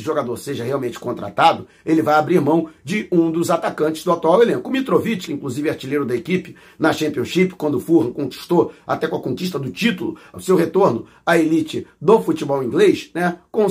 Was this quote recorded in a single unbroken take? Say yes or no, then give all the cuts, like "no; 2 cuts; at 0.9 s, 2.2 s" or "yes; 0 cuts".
no; 2 cuts; at 5.3 s, 10.3 s